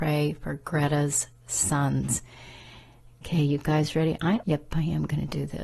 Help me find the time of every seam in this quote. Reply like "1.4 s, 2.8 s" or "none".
4.4 s